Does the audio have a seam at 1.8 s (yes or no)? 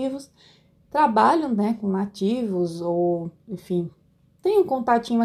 no